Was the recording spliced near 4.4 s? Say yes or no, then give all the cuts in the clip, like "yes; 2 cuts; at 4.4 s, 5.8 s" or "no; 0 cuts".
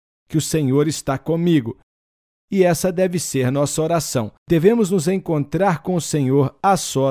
yes; 1 cut; at 4.4 s